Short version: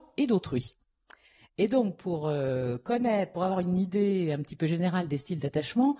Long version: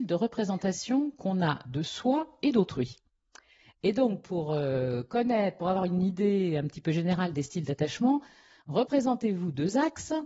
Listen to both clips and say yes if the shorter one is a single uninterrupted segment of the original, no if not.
yes